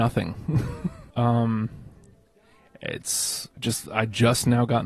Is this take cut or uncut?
cut